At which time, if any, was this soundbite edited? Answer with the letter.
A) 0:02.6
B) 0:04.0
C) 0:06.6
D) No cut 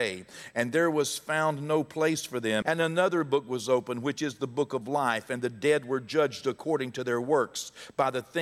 A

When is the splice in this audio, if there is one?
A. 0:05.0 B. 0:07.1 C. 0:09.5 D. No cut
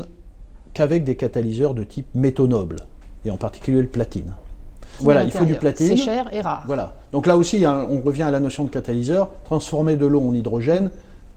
A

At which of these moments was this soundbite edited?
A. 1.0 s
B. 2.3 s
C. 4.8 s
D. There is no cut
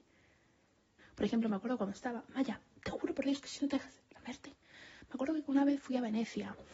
A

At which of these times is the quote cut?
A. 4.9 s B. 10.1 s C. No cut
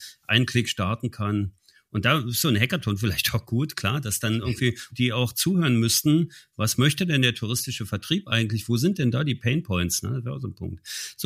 A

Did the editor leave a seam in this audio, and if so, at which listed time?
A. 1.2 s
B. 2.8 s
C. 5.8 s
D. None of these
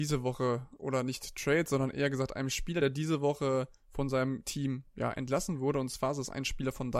D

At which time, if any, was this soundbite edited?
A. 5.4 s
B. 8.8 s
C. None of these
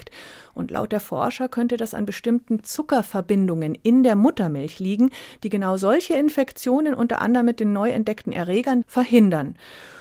B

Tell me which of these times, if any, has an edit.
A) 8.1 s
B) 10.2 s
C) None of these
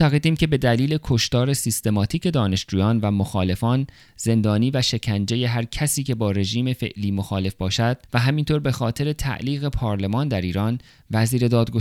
A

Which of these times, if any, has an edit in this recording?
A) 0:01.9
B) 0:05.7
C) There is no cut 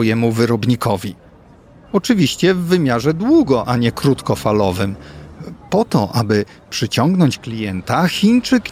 A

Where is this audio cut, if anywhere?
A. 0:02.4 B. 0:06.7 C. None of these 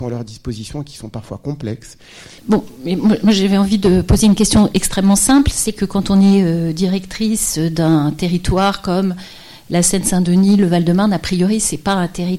A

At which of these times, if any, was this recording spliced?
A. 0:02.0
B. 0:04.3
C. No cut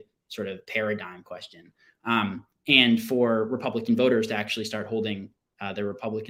A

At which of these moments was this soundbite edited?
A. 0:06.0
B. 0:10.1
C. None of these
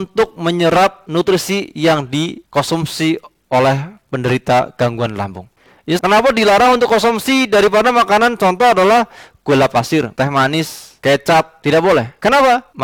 A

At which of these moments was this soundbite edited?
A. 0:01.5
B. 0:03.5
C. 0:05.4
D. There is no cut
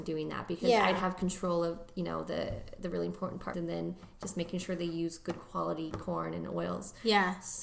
B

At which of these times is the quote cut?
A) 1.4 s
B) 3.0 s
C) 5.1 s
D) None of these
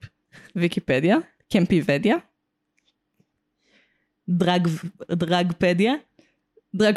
A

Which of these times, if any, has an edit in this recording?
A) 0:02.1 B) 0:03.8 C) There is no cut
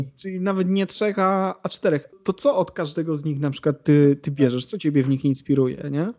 A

